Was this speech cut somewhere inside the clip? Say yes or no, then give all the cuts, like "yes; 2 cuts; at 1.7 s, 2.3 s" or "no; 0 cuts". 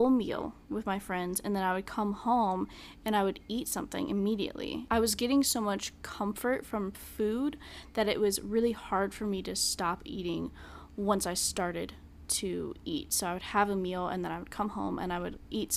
no; 0 cuts